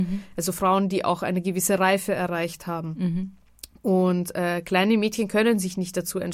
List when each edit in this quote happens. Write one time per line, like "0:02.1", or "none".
none